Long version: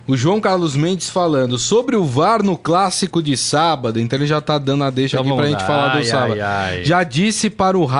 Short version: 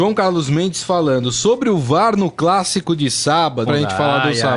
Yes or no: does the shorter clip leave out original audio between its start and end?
yes